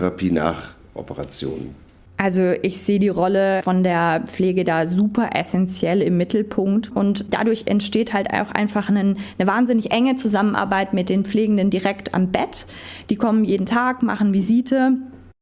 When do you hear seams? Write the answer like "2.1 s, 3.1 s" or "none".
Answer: 6.9 s